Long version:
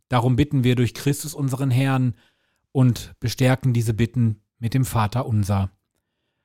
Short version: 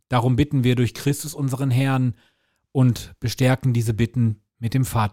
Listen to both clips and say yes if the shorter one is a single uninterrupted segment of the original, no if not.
yes